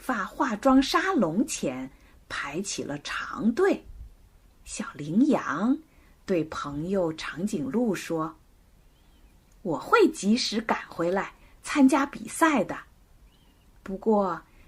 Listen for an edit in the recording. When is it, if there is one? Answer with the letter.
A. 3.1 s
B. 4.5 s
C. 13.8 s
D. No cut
B